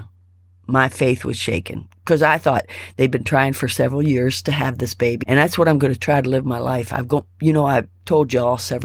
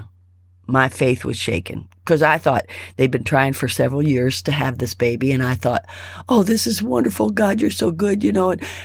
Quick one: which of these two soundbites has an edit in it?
first; 1 cut; at 5.2 s

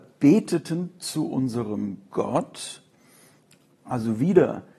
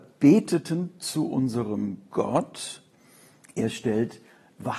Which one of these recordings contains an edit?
second; 1 cut; at 3.4 s

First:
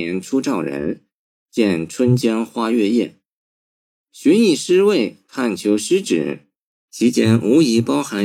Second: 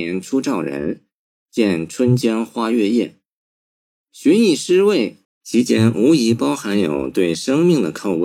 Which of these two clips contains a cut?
second; 1 cut; at 5.2 s

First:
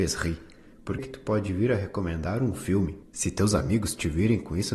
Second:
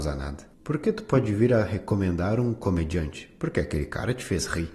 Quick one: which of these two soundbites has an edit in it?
first; 2 cuts; at 1.0 s, 3.0 s

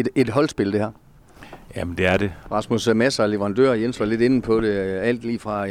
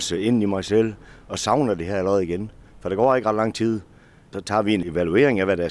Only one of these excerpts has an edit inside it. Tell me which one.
first; 1 cut; at 2.4 s

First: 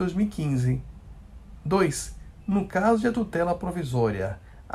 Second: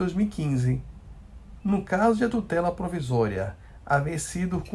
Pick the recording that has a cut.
second; 1 cut; at 1.6 s

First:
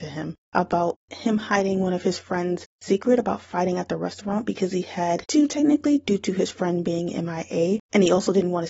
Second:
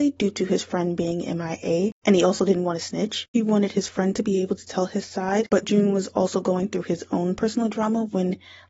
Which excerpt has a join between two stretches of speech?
second; 1 cut; at 5.6 s

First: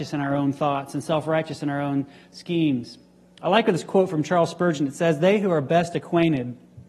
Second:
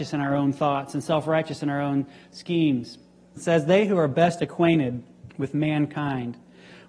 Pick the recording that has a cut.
second; 2 cuts; at 3.4 s, 5.3 s

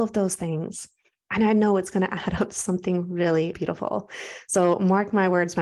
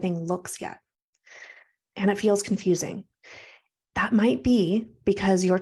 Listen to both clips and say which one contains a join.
first; 1 cut; at 3.5 s

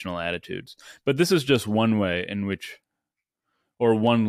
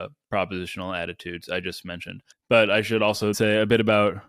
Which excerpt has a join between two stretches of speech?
second; 2 cuts; at 2.3 s, 3.3 s

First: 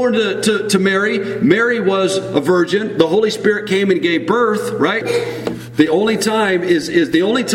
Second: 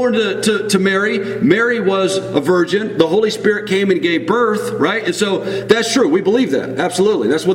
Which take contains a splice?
first; 1 cut; at 5.0 s

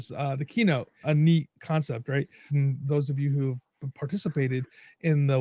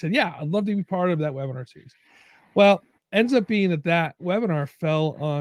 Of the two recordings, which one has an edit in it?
first; 2 cuts; at 1.0 s, 2.5 s

